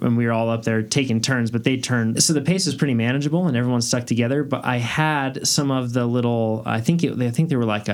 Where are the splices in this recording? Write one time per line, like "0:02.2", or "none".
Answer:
0:02.1